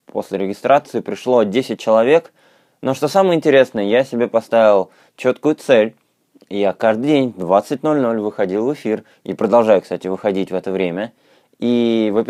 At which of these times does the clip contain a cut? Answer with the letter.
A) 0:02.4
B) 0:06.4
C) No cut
C